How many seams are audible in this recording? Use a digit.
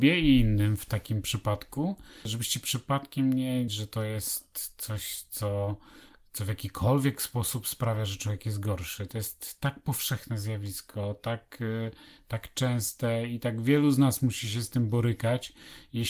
1